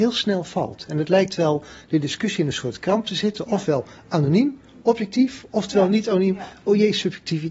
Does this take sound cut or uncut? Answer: uncut